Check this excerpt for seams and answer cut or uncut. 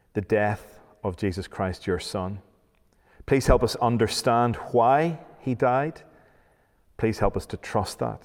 uncut